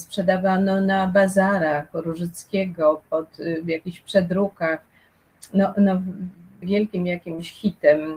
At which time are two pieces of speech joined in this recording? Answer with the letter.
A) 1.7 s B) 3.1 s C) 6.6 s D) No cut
C